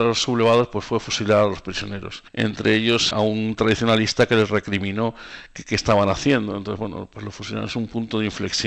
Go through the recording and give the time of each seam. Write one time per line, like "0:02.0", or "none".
0:03.1